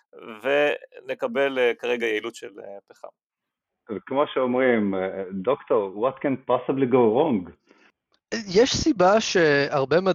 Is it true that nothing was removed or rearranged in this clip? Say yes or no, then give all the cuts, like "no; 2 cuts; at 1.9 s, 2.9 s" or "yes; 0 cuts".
yes; 0 cuts